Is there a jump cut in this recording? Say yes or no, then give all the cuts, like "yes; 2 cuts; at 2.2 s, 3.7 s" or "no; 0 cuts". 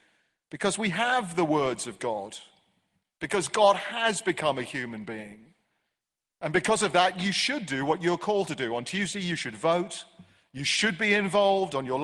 no; 0 cuts